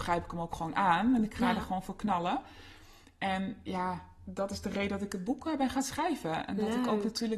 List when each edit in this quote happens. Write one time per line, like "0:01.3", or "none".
none

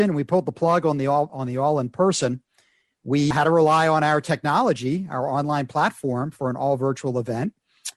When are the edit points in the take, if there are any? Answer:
0:01.3
0:03.3

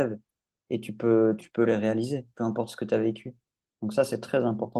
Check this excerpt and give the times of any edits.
0:01.4

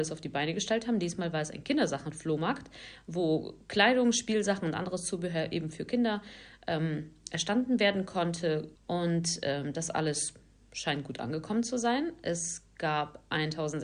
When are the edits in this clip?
0:08.8

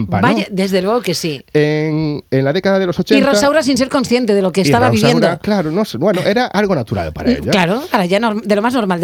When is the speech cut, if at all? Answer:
none

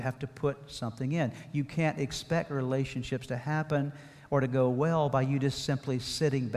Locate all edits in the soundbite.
none

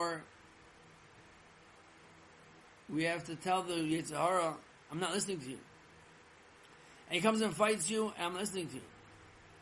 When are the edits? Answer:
none

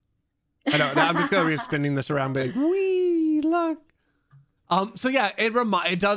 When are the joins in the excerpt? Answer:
none

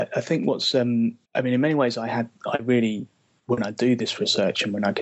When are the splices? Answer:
0:01.2

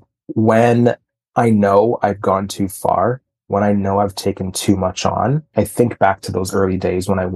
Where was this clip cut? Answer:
none

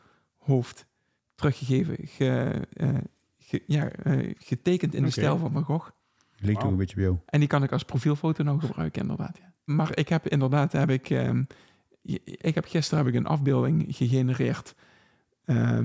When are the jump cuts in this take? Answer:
0:04.3
0:09.7

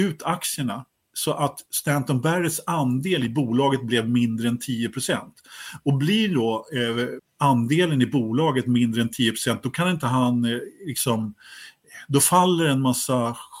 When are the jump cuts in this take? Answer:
0:07.2

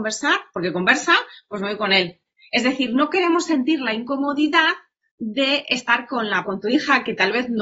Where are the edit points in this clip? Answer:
0:06.4

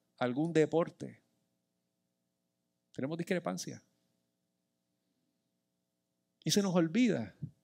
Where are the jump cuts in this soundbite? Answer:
none

